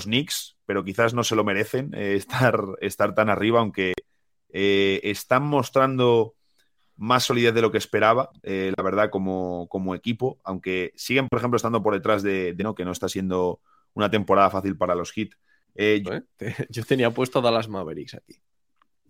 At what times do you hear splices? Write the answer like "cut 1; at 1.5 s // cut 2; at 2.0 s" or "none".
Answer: cut 1; at 12.6 s // cut 2; at 16.1 s